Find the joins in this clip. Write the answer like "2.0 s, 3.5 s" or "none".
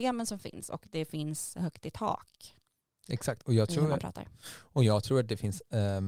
none